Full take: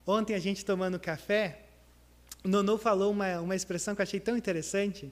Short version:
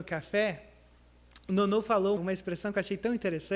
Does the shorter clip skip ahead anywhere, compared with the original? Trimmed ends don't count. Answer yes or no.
yes